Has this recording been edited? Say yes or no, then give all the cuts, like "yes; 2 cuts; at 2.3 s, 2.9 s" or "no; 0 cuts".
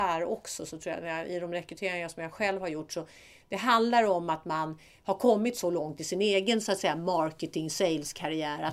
no; 0 cuts